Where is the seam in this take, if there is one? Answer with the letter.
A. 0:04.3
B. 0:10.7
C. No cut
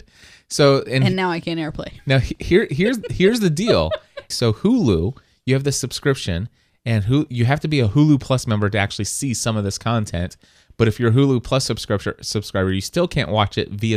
A